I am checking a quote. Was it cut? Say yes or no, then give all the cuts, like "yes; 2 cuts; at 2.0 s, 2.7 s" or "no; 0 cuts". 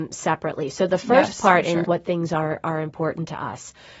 yes; 1 cut; at 1.8 s